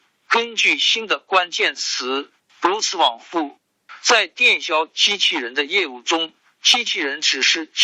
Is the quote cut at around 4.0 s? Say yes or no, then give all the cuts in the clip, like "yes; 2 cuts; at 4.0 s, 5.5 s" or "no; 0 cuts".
no; 1 cut; at 2.4 s